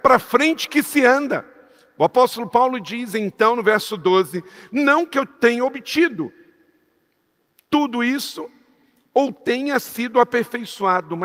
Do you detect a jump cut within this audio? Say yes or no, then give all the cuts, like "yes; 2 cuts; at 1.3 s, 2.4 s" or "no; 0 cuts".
no; 0 cuts